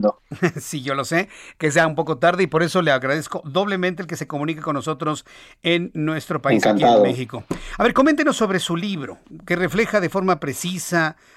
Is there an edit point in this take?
no; 0 cuts

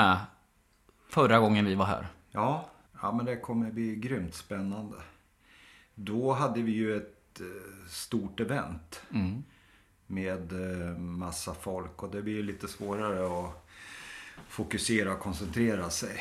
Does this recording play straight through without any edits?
no; 1 cut; at 2.9 s

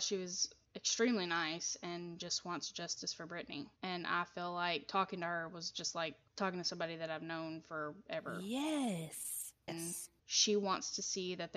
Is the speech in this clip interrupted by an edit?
yes; 2 cuts; at 3.8 s, 9.7 s

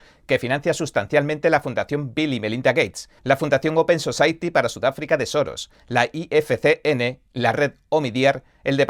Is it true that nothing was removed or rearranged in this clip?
no; 1 cut; at 3.2 s

